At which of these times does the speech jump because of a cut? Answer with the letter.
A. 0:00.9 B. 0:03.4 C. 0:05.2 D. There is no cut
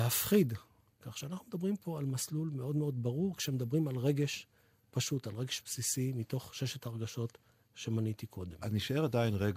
A